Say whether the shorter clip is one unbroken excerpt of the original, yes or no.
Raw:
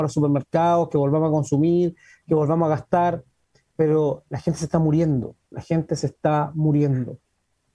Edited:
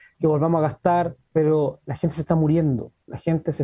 no